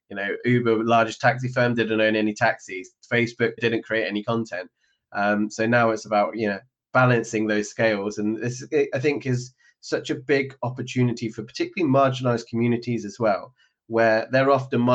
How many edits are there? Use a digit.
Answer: 1